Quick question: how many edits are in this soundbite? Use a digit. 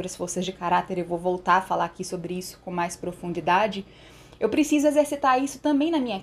0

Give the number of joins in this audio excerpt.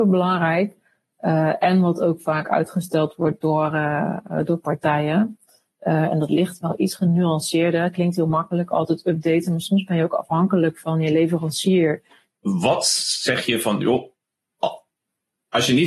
1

